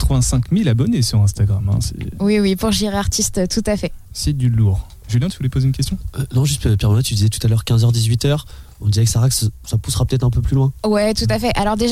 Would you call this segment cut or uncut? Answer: uncut